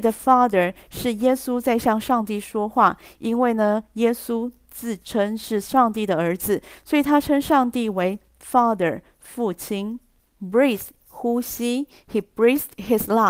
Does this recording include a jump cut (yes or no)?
yes